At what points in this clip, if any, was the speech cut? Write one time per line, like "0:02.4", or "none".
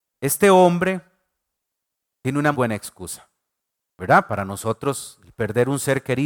0:02.5